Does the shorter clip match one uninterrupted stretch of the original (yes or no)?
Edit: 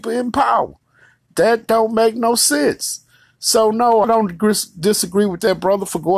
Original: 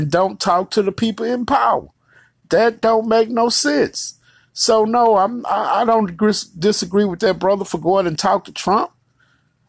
no